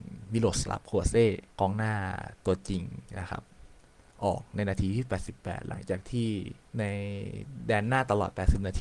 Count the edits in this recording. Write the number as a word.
two